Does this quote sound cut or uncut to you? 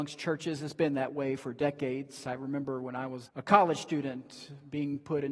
cut